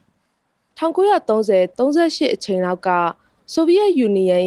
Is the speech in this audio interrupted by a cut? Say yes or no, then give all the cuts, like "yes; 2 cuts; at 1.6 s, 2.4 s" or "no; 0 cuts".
yes; 1 cut; at 1.7 s